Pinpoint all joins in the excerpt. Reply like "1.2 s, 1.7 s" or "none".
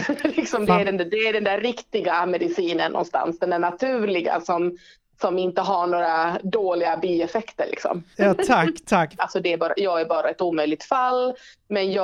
8.1 s, 9.2 s